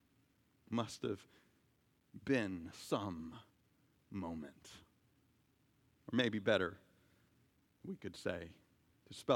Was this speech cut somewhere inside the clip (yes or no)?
yes